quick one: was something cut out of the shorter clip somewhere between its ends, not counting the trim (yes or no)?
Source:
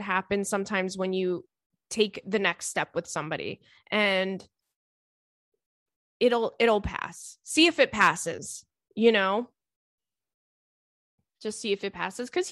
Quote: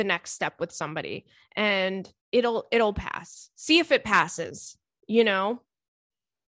yes